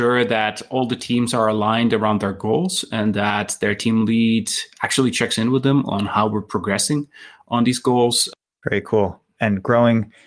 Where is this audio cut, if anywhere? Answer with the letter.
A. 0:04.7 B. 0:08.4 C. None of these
B